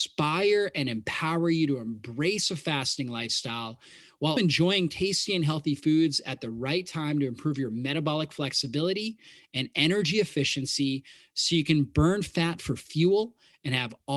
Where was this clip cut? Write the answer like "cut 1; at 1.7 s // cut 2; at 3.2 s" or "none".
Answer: cut 1; at 4.4 s